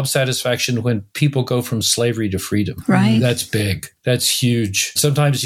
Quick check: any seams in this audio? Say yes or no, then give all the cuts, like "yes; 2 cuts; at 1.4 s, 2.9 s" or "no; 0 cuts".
no; 0 cuts